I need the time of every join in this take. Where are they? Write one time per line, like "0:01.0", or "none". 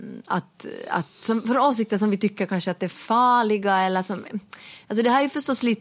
none